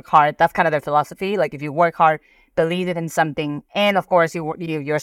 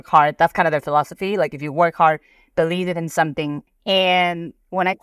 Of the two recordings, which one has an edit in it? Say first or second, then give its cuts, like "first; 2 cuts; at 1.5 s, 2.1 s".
second; 1 cut; at 3.7 s